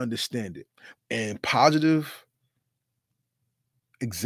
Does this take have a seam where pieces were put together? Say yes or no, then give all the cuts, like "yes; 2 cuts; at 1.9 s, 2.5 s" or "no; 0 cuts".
yes; 1 cut; at 1.0 s